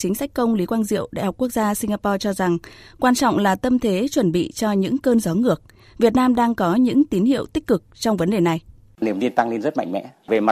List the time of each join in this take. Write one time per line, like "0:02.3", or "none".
none